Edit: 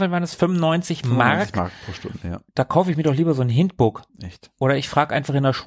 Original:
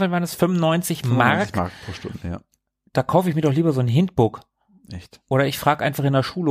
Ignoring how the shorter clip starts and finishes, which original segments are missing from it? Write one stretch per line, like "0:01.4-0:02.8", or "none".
0:02.5-0:02.9
0:04.5-0:04.8

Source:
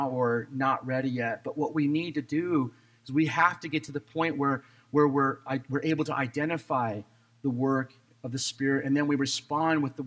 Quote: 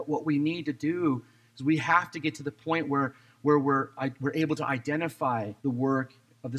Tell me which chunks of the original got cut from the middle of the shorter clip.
0:07.1-0:07.4

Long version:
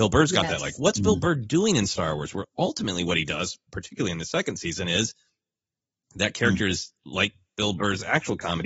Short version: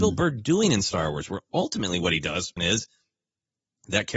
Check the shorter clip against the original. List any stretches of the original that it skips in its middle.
0:03.6-0:04.8

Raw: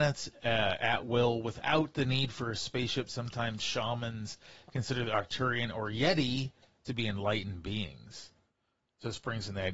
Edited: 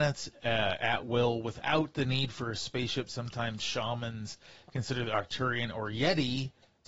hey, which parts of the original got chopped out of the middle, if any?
none

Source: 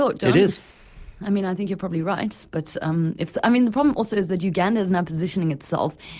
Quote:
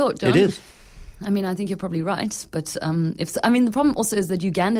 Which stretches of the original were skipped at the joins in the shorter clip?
none

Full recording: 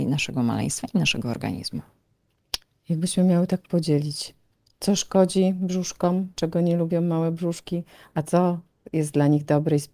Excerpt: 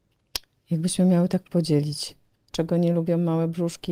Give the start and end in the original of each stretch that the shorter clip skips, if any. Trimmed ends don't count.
0:04.7-0:06.3

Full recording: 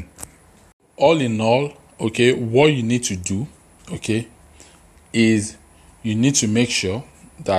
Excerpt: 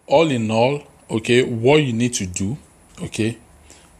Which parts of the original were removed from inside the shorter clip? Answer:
none

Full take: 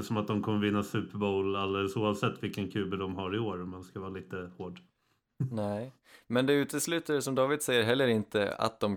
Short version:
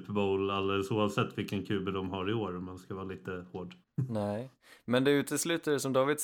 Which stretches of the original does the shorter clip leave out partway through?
0:04.9-0:05.2

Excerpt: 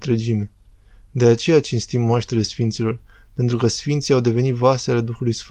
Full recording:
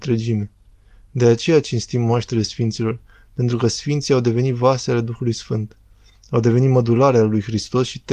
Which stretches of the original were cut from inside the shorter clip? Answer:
none

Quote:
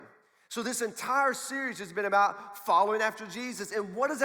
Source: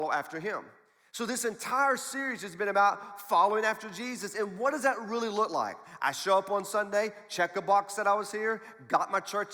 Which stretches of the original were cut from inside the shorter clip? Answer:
none

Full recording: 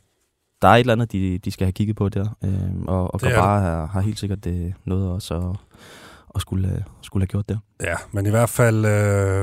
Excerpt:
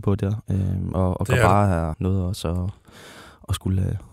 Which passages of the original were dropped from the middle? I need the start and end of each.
0:03.9-0:04.8

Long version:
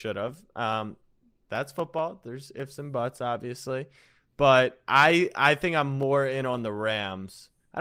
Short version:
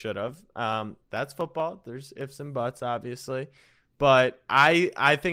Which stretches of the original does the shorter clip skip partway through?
0:01.0-0:01.4

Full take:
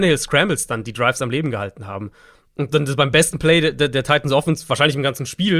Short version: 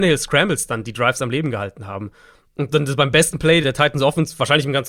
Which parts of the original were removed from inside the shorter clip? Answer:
0:03.6-0:03.9

